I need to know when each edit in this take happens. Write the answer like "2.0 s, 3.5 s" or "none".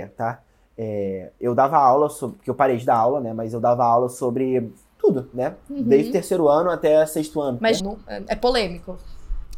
7.8 s